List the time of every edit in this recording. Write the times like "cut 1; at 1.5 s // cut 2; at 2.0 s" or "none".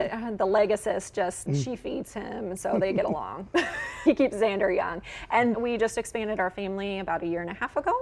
cut 1; at 1.5 s // cut 2; at 4.1 s // cut 3; at 5.5 s